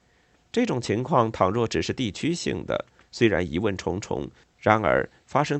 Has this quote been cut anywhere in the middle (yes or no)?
yes